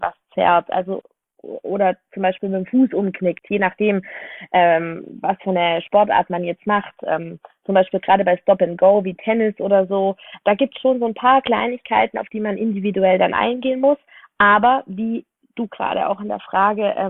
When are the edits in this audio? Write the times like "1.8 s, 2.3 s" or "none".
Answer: none